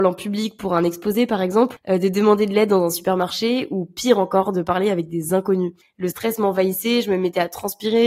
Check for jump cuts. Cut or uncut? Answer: uncut